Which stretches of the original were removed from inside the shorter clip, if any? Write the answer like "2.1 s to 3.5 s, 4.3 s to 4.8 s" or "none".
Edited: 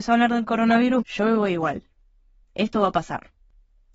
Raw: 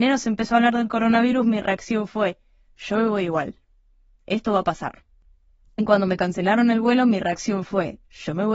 1.4 s to 2.7 s